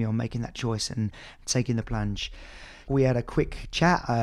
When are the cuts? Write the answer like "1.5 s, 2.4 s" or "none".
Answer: 2.9 s